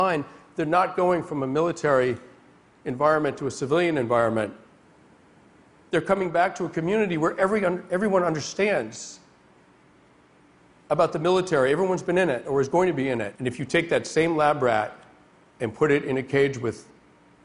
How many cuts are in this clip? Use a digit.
1